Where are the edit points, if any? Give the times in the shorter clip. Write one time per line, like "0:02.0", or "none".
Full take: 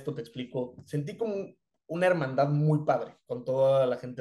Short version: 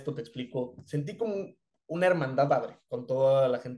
0:02.5